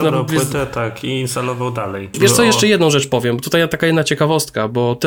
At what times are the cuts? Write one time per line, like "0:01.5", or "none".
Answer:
0:02.1